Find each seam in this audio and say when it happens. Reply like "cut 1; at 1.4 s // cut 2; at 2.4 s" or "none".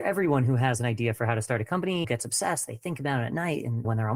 none